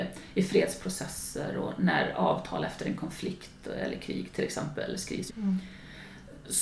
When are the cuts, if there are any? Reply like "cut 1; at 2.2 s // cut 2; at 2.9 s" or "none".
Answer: cut 1; at 5.3 s